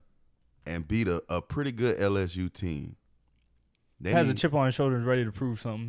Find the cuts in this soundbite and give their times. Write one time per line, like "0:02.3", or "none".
0:04.1